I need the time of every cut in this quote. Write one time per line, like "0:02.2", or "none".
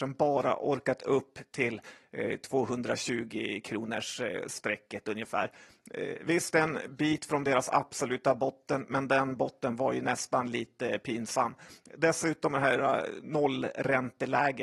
none